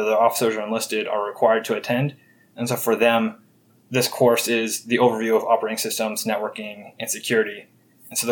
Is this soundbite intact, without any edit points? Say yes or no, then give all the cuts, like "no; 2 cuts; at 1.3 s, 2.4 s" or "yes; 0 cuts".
yes; 0 cuts